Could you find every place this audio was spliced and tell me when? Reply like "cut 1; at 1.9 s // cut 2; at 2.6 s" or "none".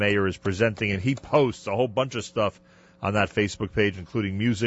none